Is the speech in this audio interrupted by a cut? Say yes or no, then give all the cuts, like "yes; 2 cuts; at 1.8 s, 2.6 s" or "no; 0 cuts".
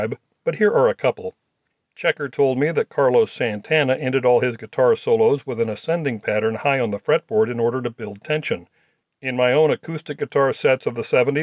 no; 0 cuts